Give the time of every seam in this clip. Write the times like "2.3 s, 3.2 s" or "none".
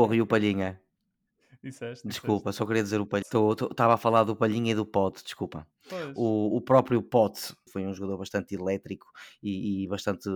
3.2 s, 7.7 s